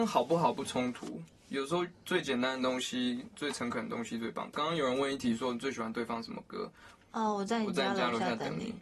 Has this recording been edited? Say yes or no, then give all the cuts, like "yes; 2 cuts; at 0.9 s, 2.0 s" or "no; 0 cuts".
yes; 2 cuts; at 1.4 s, 7.0 s